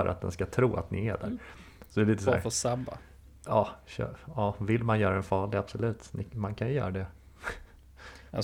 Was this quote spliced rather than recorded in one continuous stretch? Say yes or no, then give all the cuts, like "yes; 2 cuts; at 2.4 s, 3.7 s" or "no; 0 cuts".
no; 0 cuts